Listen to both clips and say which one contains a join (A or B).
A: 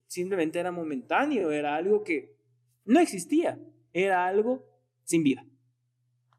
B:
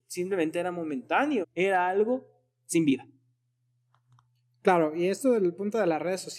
B